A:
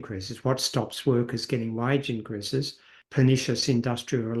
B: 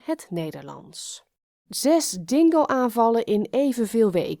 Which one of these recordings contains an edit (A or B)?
B